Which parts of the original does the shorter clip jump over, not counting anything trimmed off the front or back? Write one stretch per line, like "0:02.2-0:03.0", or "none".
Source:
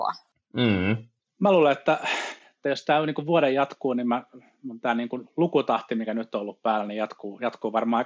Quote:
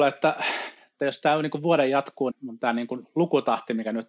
0:03.9-0:04.5